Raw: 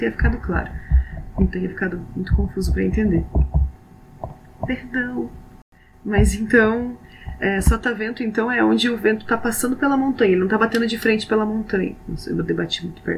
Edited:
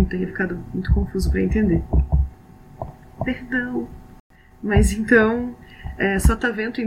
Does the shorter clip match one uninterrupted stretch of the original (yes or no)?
yes